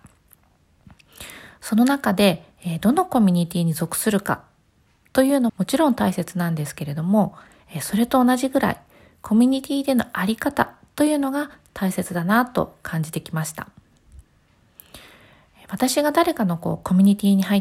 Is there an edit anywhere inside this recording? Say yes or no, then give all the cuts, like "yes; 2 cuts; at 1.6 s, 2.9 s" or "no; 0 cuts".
yes; 1 cut; at 5.5 s